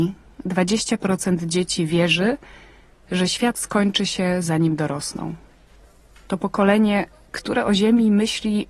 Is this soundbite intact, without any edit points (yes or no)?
yes